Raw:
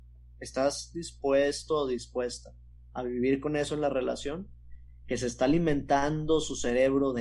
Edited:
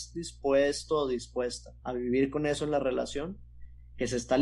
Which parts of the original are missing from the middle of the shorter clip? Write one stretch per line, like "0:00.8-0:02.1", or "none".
0:02.6-0:02.9